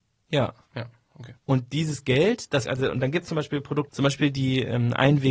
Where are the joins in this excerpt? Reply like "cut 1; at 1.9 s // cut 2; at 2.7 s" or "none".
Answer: cut 1; at 1.4 s // cut 2; at 2.7 s // cut 3; at 3.9 s